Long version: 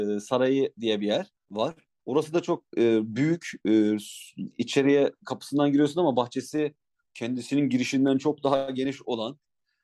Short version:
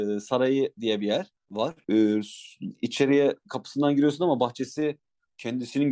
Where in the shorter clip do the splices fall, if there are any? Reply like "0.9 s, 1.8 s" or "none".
1.8 s

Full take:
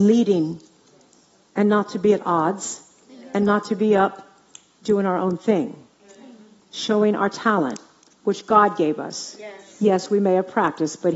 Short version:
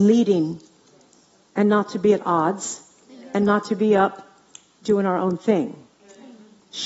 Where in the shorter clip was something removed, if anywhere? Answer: none

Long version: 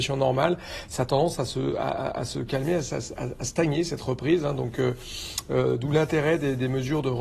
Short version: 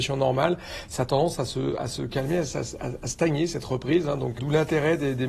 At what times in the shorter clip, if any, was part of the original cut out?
1.8 s, 4.4 s

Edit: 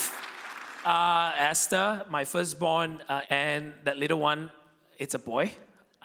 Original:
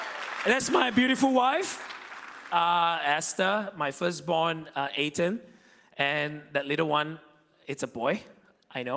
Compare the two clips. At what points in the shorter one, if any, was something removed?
3.2 s

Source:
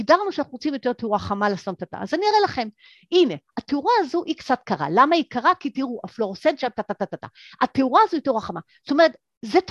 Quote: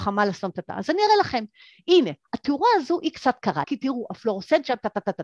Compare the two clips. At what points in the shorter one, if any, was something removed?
3.6 s

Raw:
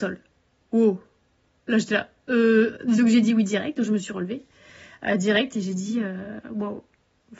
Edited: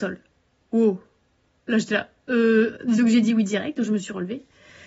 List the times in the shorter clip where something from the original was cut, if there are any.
none

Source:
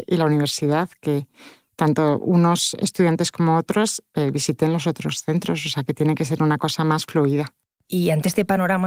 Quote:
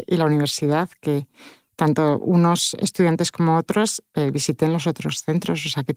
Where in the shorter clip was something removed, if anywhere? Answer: none

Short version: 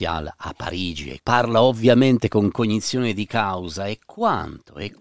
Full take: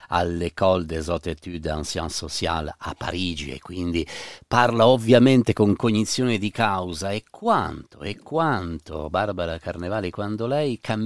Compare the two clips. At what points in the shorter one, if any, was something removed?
1.2 s

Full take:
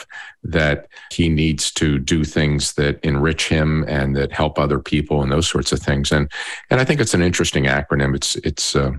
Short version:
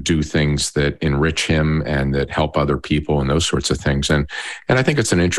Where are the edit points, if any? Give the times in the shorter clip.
none

